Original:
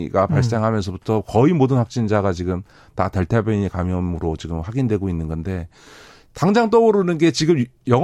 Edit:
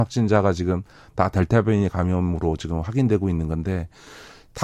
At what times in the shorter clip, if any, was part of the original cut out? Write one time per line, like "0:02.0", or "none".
none